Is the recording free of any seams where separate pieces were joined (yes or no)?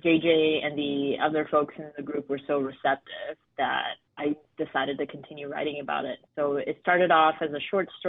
no